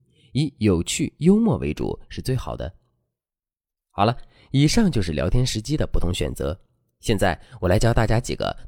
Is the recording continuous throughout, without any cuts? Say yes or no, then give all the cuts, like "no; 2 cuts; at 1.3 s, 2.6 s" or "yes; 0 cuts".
yes; 0 cuts